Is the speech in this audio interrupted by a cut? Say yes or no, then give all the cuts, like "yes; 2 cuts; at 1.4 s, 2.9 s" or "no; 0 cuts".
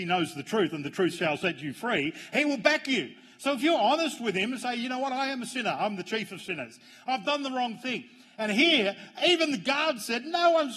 no; 0 cuts